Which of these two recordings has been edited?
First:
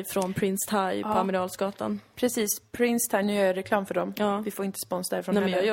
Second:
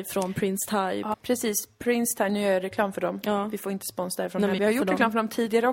second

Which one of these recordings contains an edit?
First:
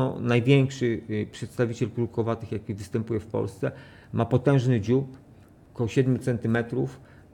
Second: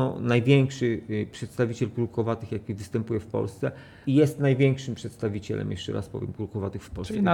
second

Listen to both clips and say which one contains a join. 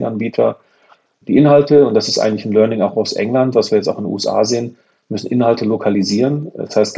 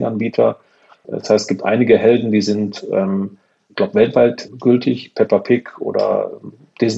second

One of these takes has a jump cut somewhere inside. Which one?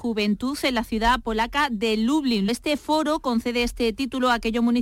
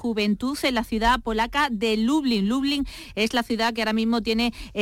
first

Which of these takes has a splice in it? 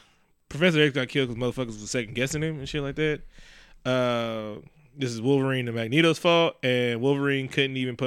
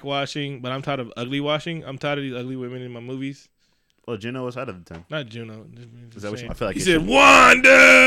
second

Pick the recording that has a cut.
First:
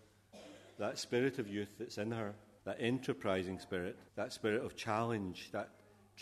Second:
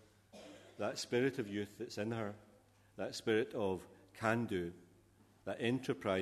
first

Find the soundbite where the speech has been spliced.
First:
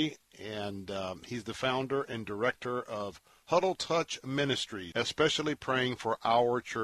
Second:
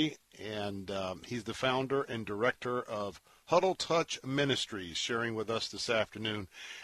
first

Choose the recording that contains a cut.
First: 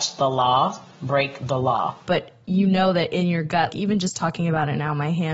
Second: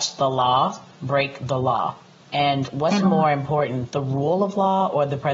first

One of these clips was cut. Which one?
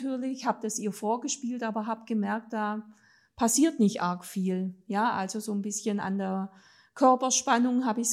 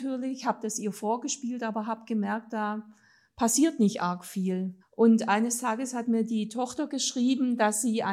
second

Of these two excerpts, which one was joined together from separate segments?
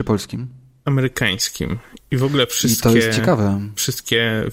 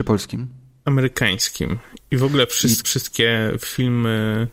second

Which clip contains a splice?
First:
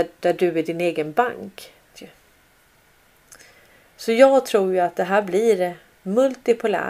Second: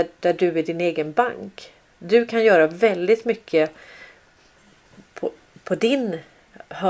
first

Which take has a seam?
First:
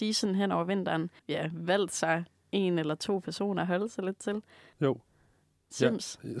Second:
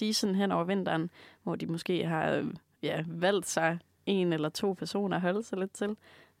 first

